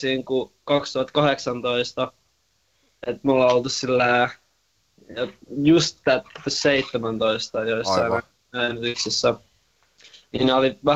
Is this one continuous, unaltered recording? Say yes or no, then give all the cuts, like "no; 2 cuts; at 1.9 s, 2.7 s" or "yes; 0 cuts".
yes; 0 cuts